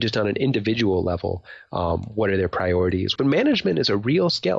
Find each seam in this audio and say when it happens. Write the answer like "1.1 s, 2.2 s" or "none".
3.2 s